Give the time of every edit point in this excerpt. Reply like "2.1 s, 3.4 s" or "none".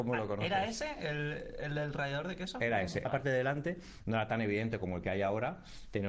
3.0 s

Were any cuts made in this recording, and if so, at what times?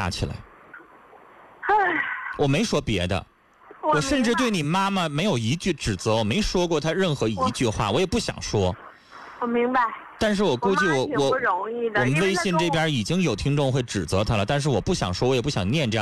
none

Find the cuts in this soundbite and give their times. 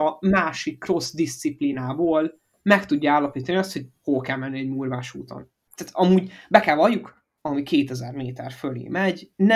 5.7 s, 7.4 s

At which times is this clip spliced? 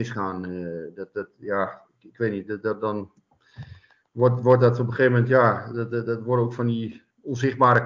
none

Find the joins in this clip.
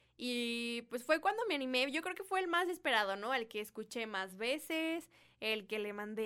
none

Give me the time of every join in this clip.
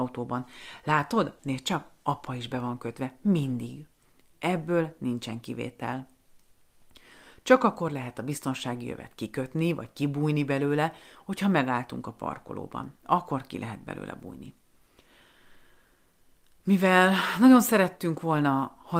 1.4 s

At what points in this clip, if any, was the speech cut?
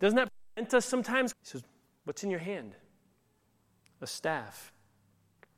1.3 s

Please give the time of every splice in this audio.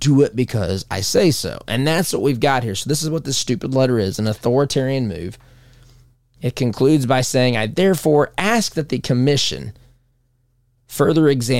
none

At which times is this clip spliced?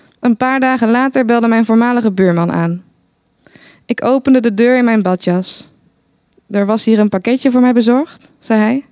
none

